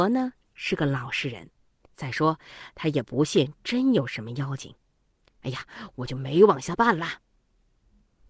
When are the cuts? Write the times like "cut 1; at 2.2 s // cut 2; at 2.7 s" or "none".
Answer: cut 1; at 1.8 s // cut 2; at 5.3 s

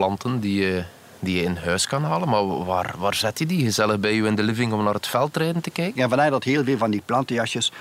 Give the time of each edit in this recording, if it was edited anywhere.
cut 1; at 6.0 s

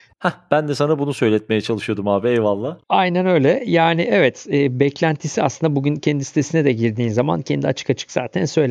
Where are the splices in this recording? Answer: none

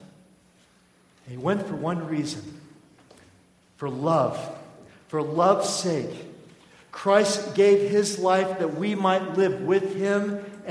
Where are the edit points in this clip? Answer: none

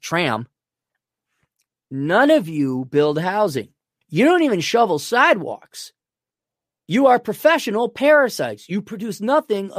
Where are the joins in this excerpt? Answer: cut 1; at 4.0 s

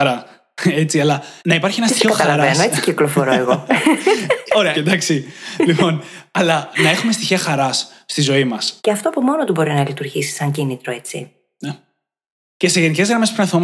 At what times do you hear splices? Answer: cut 1; at 1.4 s // cut 2; at 4.7 s // cut 3; at 8.8 s

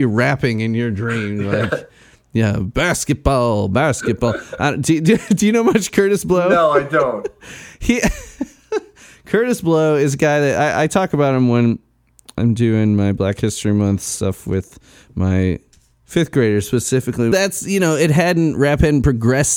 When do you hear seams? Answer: cut 1; at 17.3 s

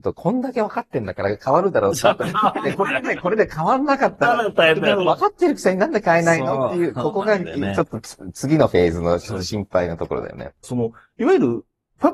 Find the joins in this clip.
cut 1; at 10.6 s

